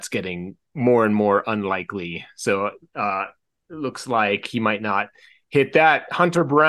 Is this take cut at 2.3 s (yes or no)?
no